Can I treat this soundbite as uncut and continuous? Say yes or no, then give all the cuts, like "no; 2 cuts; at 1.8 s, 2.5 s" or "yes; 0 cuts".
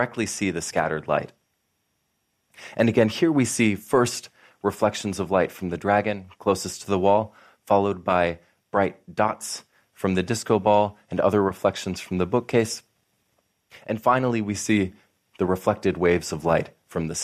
yes; 0 cuts